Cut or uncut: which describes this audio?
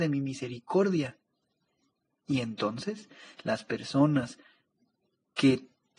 uncut